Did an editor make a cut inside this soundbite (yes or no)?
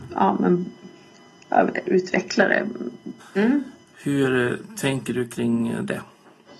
yes